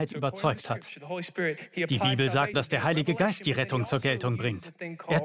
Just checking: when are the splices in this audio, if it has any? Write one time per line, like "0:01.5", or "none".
0:02.5

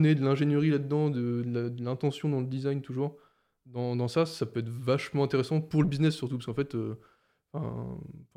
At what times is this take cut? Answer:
none

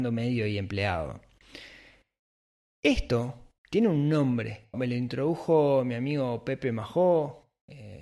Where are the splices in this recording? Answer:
0:03.6
0:04.7

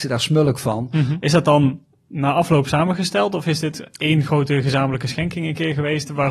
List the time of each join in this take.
0:01.2

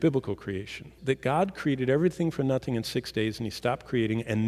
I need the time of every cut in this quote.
0:01.0

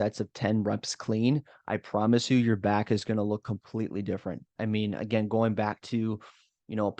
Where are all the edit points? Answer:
0:04.6

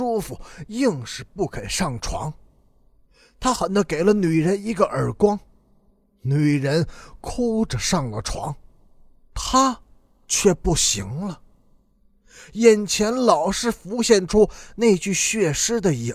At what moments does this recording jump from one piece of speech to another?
0:03.6

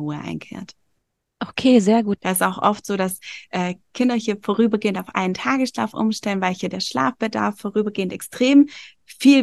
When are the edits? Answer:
0:02.2

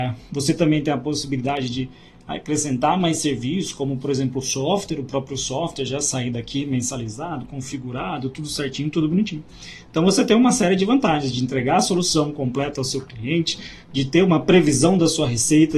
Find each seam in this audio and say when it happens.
none

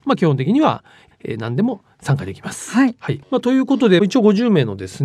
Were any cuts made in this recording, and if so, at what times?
0:01.1
0:03.2

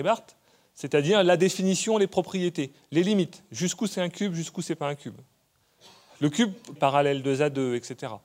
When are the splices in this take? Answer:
0:06.8

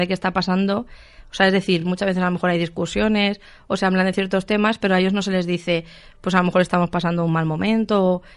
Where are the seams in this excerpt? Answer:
none

